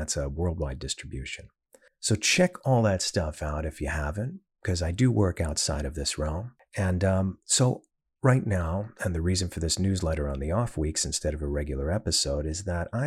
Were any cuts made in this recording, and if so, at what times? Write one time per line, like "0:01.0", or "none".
none